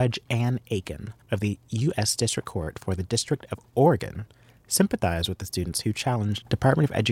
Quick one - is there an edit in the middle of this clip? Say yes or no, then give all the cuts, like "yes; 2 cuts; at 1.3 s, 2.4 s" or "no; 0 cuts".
no; 0 cuts